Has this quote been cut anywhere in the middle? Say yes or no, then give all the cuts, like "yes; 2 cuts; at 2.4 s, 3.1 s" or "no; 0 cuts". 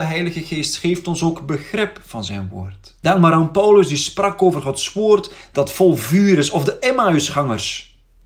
no; 0 cuts